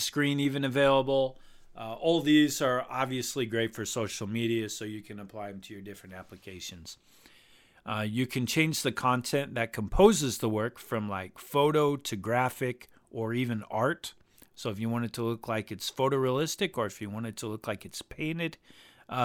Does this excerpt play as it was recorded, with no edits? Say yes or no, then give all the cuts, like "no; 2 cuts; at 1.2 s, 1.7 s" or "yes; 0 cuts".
yes; 0 cuts